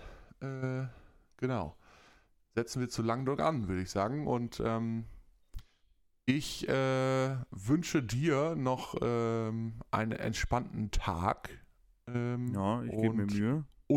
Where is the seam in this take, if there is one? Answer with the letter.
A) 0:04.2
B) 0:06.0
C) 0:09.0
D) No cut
D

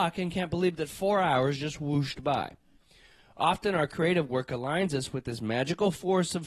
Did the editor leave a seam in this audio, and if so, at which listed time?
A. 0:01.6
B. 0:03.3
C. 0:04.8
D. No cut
D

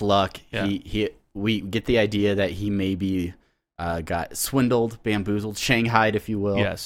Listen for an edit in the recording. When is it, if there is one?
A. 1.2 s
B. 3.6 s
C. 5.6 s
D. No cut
D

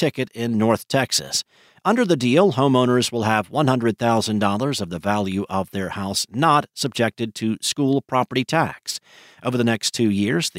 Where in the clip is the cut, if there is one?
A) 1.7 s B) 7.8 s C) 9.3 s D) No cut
A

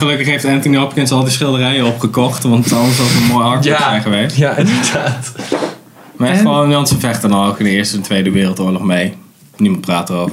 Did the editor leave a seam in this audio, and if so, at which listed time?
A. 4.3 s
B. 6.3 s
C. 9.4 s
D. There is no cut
D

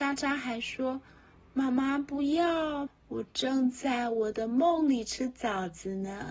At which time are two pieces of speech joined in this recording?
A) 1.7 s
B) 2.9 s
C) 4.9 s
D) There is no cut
B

